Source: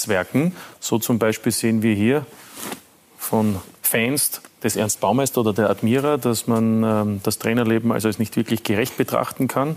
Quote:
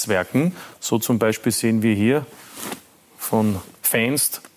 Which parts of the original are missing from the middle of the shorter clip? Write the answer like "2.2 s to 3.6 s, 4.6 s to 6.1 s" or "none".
none

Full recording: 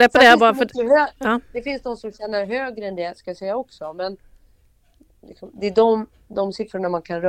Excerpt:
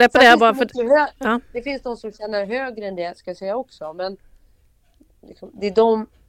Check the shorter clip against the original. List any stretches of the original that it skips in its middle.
none

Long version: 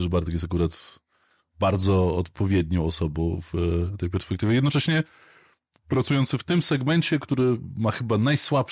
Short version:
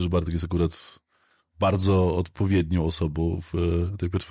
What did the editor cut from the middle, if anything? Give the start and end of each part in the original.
none

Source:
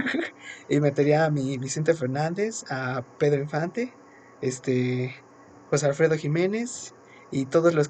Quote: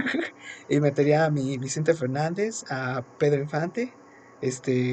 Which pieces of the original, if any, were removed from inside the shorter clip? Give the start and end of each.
none

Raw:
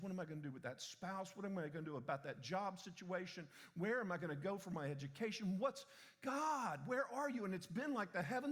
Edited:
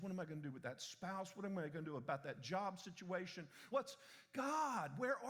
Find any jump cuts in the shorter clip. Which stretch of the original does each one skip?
3.7 s to 5.6 s

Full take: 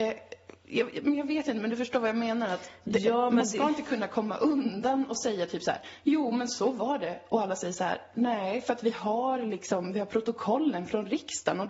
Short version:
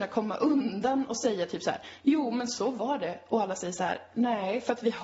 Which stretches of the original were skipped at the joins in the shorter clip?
none

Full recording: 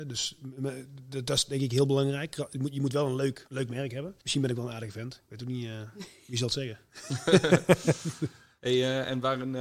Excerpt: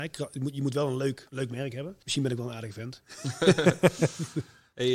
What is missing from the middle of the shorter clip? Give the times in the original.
5.2 s to 6.8 s

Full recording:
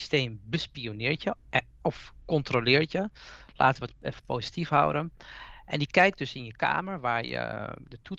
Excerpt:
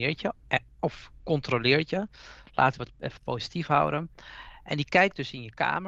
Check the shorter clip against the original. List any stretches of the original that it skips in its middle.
none

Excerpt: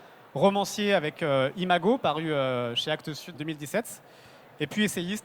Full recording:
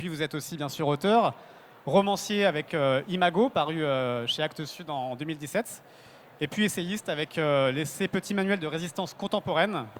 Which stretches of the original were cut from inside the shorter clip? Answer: 4.9 s to 5.1 s

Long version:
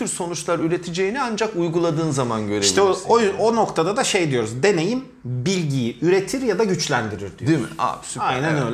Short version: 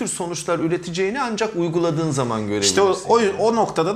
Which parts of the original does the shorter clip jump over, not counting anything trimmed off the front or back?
none

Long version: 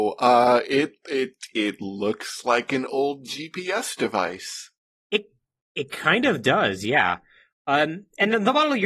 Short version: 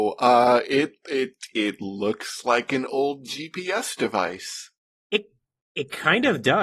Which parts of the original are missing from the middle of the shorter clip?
none

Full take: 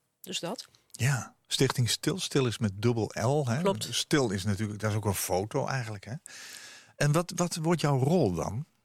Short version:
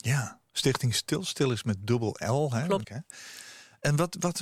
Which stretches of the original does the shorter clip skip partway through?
3.8 s to 6.0 s

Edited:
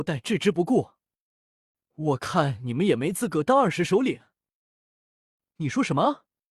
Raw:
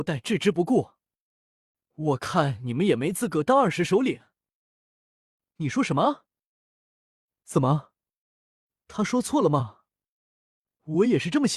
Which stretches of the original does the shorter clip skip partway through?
none

